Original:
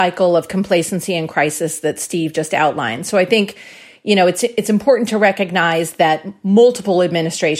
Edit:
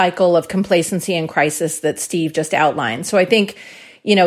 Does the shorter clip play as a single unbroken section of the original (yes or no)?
yes